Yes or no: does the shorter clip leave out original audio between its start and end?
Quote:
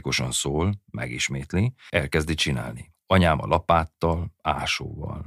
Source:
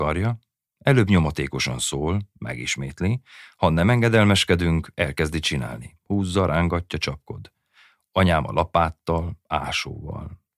yes